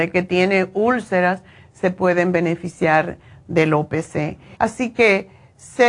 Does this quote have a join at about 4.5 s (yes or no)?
yes